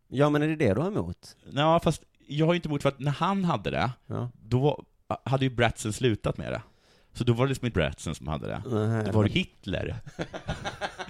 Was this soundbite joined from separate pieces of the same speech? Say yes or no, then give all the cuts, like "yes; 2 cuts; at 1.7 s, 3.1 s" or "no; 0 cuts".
yes; 2 cuts; at 7.7 s, 9.3 s